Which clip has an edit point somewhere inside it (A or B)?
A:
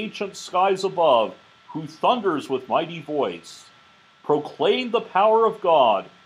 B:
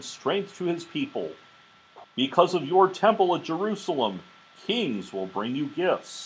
B